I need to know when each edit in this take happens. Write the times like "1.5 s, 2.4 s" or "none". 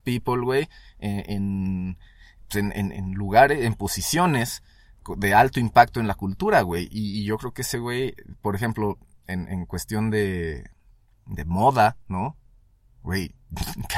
2.9 s